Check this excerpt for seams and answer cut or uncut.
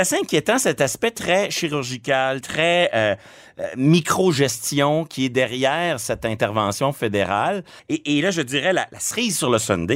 cut